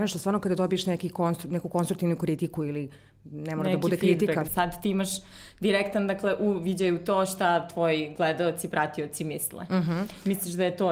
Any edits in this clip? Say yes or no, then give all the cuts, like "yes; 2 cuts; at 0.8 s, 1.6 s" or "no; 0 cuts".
yes; 1 cut; at 4.5 s